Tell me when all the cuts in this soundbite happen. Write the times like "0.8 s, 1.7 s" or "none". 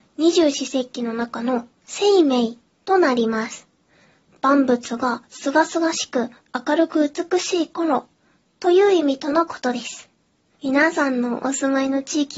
10.5 s